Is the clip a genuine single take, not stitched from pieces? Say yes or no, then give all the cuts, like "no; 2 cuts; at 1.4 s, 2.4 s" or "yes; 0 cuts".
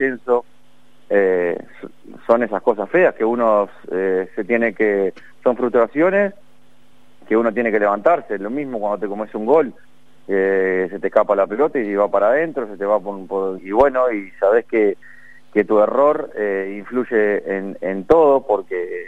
no; 1 cut; at 13.6 s